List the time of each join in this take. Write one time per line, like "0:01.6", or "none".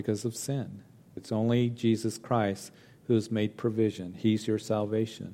0:01.2